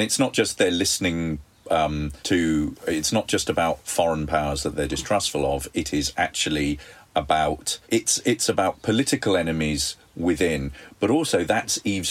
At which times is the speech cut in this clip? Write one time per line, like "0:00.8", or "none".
0:02.2
0:07.8

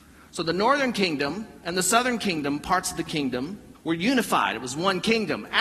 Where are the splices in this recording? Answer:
0:03.7

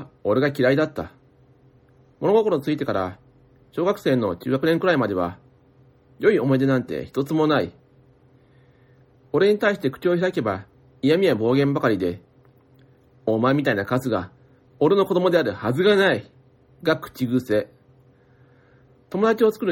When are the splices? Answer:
none

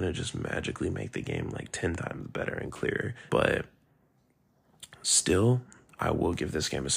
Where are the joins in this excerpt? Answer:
0:03.3
0:06.0

